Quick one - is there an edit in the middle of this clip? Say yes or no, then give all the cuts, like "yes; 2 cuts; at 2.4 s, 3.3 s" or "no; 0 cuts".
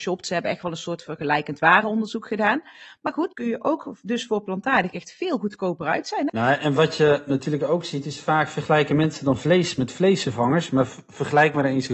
yes; 1 cut; at 3.3 s